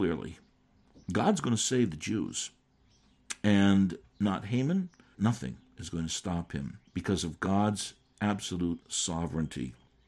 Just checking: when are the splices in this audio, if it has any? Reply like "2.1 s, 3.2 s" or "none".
5.1 s, 6.9 s

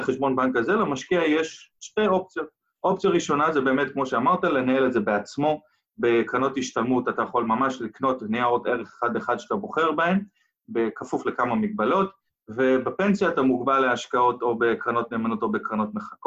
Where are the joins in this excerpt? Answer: none

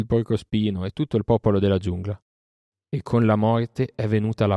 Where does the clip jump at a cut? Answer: 2.7 s

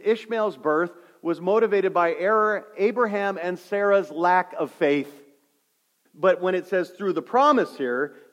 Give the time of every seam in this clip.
6.1 s

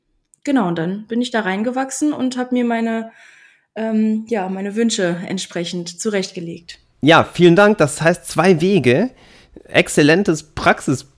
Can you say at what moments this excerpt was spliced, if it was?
none

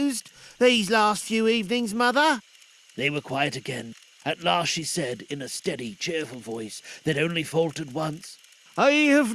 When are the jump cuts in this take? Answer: none

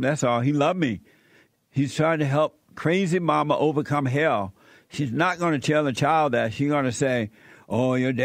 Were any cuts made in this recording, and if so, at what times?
none

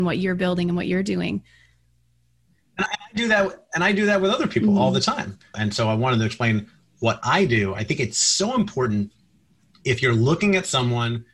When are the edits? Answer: 5.5 s

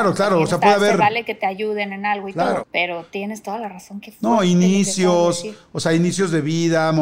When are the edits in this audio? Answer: 2.6 s

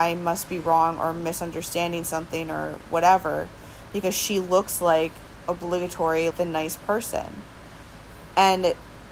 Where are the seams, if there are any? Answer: 6.3 s

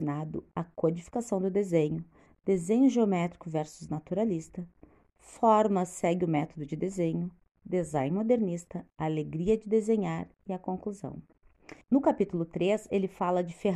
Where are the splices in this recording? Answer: 11.8 s

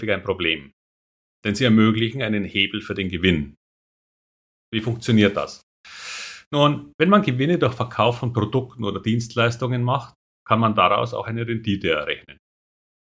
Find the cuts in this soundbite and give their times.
none

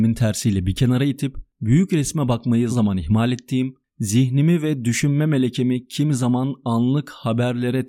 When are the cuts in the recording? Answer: 2.7 s

